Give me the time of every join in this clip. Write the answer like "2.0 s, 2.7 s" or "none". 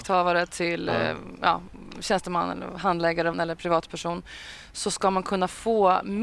3.3 s